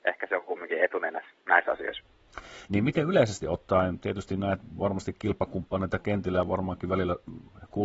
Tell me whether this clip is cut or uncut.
cut